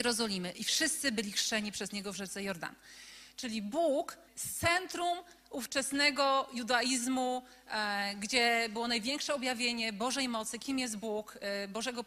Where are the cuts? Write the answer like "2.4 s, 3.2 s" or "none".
4.3 s